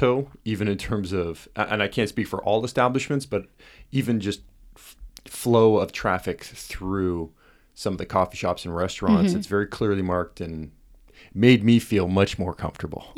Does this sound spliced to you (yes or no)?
no